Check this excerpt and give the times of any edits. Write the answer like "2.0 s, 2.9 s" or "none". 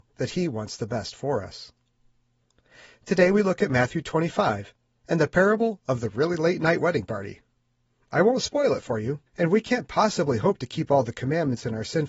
9.3 s